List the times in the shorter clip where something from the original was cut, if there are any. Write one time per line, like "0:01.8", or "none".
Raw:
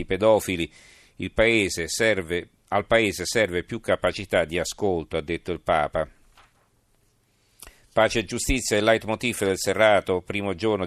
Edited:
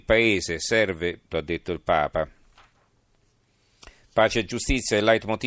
0:01.3

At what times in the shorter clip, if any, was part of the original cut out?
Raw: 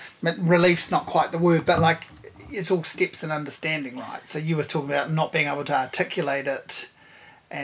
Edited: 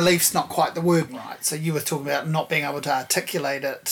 0:01.1

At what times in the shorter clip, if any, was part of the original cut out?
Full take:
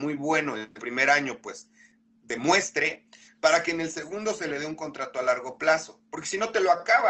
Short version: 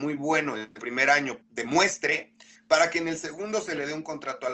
0:01.4

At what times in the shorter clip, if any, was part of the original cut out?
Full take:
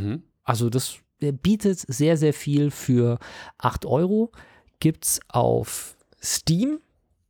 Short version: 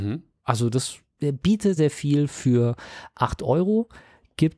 0:01.8

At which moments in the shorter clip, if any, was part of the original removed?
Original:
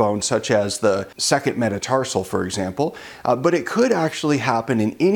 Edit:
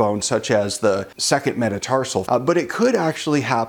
0:02.3

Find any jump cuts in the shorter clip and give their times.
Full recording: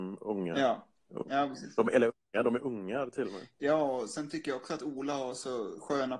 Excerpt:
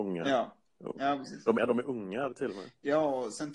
0:01.6

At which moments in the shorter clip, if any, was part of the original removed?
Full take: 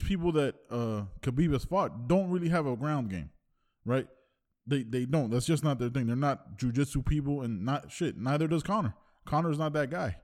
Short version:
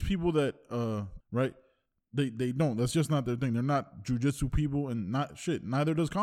0:01.2

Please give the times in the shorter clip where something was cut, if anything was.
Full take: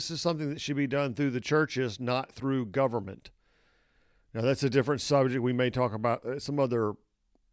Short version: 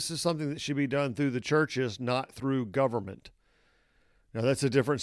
none

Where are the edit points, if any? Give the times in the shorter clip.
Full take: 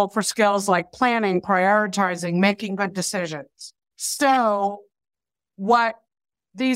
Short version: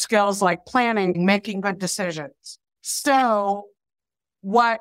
0:01.1

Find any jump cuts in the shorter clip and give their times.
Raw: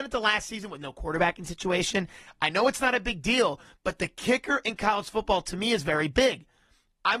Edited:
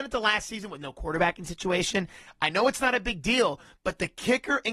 none

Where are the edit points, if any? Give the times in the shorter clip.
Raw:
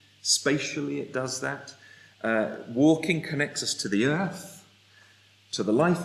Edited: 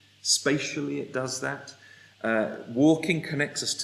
none

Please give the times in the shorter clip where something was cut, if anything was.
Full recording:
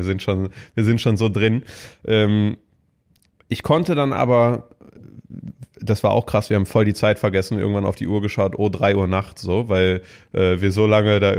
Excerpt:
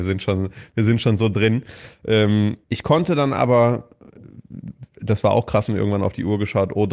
0:02.6
0:05.7

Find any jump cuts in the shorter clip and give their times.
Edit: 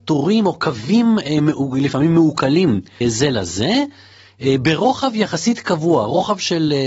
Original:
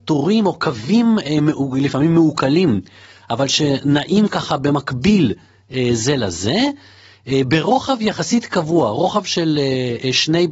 0:03.0

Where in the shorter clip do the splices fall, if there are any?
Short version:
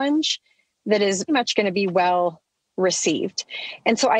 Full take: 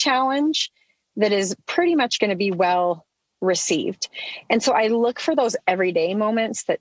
0:01.3

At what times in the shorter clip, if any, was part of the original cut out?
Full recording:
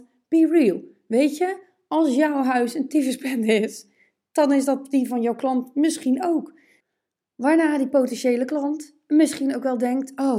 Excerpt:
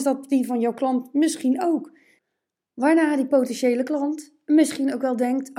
none

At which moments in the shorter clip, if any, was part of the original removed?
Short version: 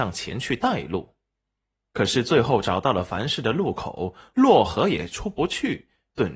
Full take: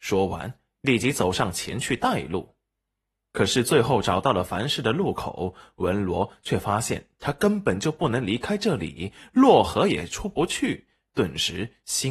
0:04.3

